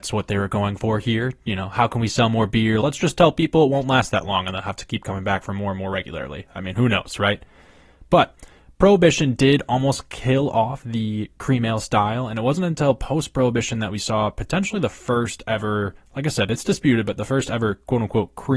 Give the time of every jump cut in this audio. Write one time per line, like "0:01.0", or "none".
0:02.8